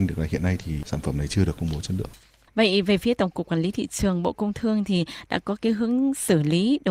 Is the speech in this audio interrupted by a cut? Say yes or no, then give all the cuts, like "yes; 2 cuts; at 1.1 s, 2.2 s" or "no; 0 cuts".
no; 0 cuts